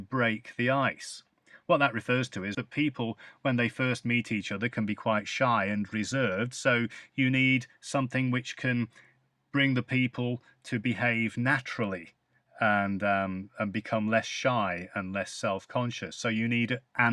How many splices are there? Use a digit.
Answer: 1